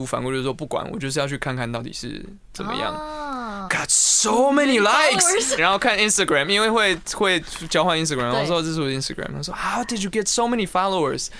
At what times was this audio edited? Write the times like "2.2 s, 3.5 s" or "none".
3.7 s, 5.6 s